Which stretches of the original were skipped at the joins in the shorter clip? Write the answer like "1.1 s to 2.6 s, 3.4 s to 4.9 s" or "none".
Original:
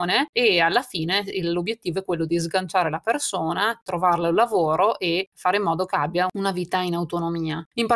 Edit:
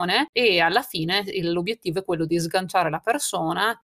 none

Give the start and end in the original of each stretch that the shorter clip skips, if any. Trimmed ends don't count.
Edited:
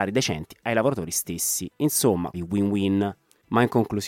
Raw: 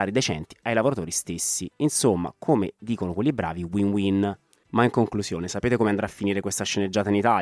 2.3 s to 3.6 s

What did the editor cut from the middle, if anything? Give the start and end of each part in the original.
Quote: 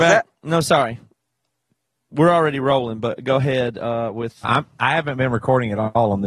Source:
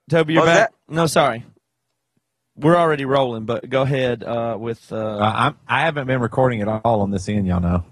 4.9 s to 5.3 s

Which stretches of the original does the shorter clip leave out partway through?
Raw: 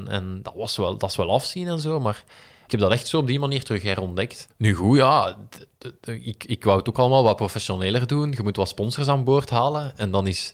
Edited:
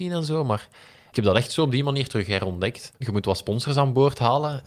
4.6 s to 8.3 s

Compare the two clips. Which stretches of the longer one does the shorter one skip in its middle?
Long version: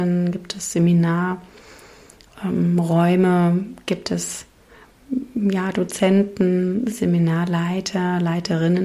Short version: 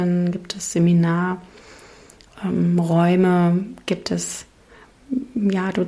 none

